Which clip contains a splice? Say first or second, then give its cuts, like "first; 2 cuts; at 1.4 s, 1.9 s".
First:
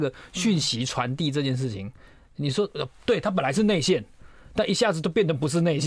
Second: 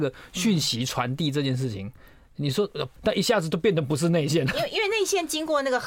second; 1 cut; at 3.0 s